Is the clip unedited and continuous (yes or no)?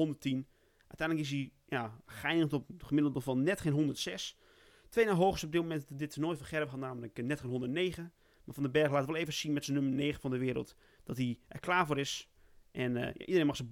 yes